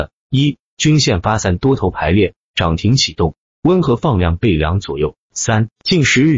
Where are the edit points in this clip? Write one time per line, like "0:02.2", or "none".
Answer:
0:02.5